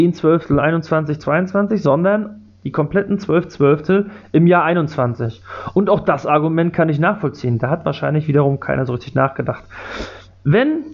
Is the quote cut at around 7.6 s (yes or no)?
no